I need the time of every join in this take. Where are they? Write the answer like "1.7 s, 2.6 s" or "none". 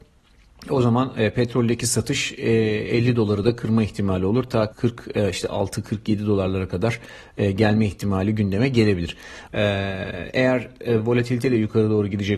4.7 s, 9.5 s